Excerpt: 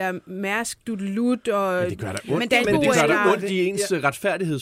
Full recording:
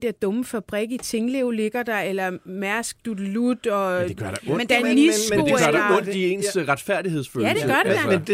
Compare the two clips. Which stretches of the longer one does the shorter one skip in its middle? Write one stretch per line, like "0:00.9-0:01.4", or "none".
0:04.8-0:05.3

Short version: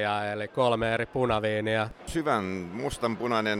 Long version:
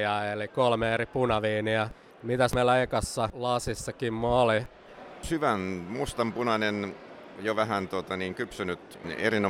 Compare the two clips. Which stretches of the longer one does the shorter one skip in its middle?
0:02.0-0:05.1

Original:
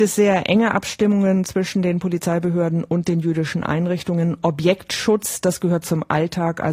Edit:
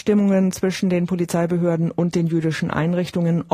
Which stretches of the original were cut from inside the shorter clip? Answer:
none

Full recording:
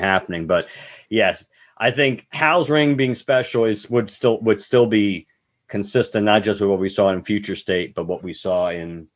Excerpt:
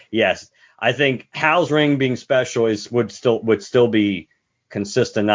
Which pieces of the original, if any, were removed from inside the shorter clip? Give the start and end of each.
none

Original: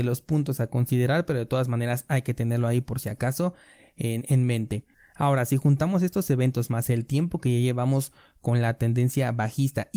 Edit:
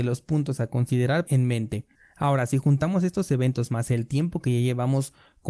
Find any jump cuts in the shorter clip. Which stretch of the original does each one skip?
0:01.3-0:04.2

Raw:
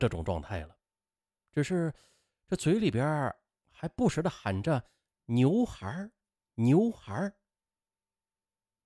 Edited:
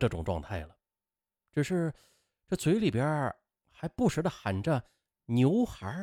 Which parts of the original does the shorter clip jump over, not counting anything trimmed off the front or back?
none

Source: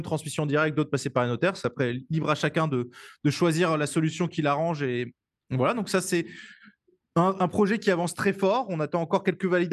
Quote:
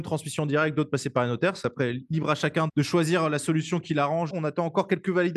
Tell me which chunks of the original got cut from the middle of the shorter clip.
0:02.7-0:03.2
0:04.8-0:08.7

